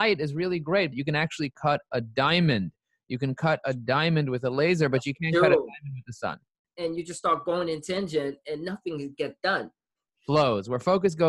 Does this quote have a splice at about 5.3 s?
no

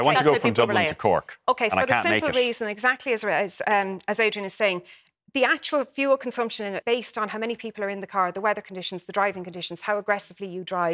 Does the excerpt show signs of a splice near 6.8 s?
yes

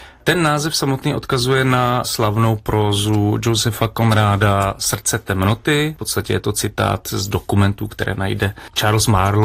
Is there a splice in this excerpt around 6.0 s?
no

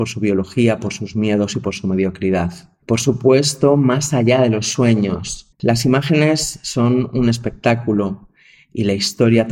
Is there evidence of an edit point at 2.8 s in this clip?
yes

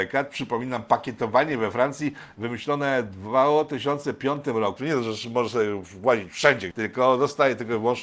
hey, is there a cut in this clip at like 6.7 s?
yes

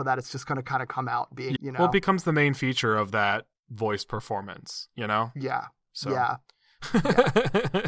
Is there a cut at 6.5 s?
no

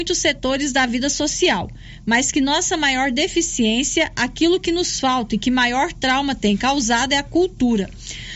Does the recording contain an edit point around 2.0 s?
no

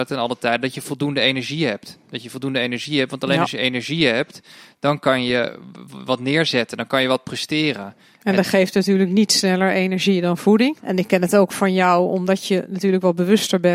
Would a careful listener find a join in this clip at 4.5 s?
no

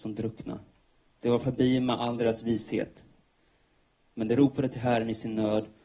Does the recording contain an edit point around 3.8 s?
no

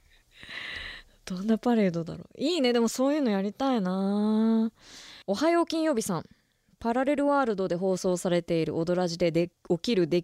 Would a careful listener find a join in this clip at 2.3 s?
no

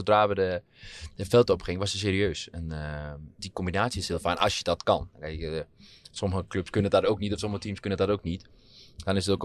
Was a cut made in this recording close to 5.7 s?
no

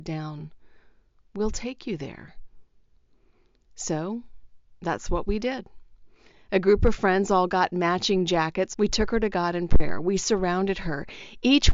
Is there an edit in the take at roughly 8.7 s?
yes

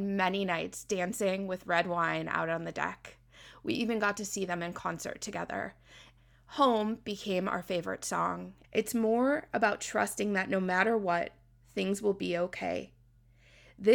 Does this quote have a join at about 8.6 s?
yes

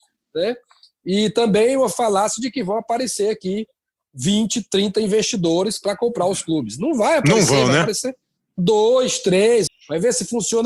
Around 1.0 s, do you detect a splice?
no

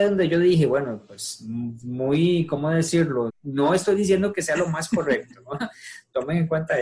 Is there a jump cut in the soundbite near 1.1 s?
no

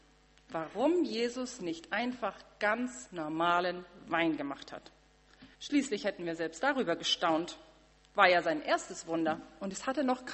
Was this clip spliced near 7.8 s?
no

